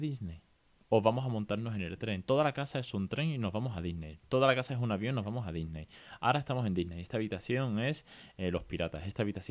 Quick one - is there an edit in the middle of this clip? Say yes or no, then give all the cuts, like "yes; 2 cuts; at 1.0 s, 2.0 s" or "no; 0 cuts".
no; 0 cuts